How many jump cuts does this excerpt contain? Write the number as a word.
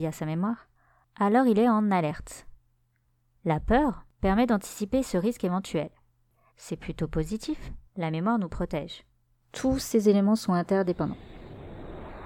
three